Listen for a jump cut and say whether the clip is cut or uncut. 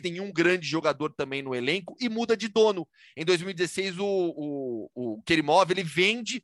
uncut